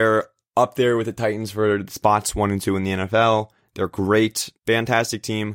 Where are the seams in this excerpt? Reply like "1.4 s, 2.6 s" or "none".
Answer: 4.6 s